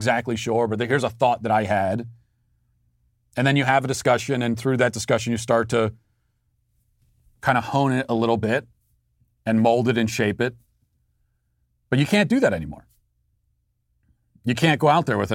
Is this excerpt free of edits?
yes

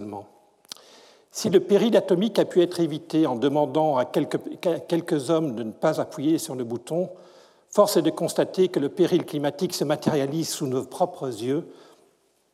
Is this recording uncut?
yes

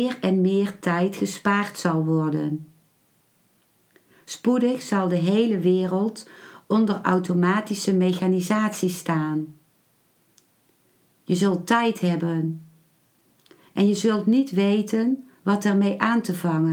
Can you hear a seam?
no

